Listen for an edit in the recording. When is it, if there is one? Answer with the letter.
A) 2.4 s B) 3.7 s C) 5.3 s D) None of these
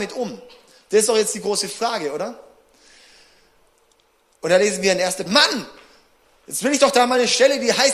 C